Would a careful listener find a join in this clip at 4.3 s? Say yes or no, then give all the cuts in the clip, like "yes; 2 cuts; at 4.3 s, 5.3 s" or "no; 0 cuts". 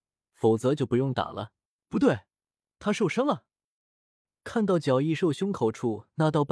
no; 1 cut; at 1.8 s